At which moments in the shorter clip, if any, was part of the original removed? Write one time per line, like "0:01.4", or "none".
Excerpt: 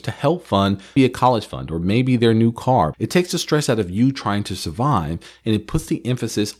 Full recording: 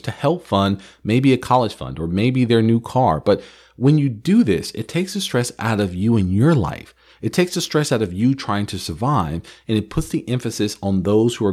0:01.0
0:02.9